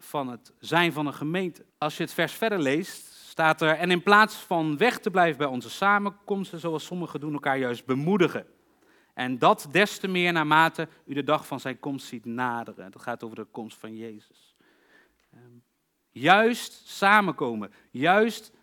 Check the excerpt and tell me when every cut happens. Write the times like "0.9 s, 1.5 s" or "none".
1.7 s

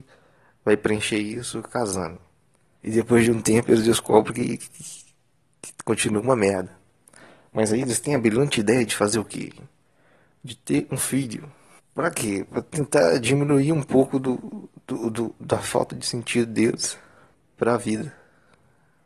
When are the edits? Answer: 2.8 s

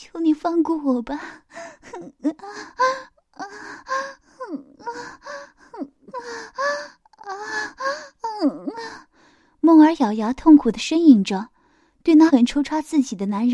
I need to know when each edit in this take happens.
12.3 s

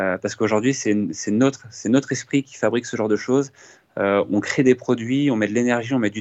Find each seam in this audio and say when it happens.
none

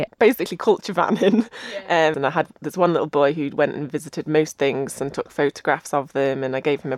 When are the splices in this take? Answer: 2.1 s

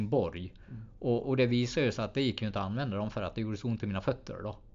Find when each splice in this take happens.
1.2 s

